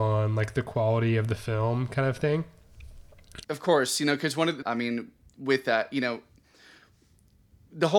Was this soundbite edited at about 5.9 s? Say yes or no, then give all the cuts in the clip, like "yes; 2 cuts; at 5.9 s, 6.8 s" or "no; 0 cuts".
no; 2 cuts; at 3.4 s, 4.6 s